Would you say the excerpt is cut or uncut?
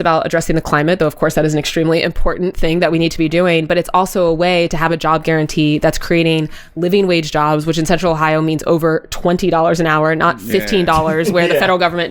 uncut